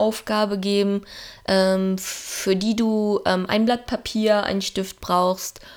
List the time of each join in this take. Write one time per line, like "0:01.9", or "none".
none